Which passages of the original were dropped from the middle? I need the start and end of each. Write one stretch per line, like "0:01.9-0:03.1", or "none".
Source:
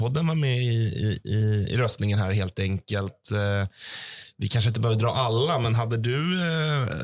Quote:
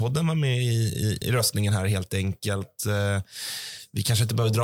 0:01.2-0:01.7